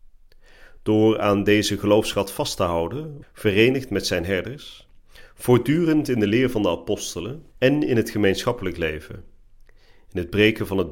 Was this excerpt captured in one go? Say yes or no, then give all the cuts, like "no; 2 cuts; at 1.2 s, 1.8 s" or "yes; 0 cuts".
no; 2 cuts; at 3.2 s, 7.5 s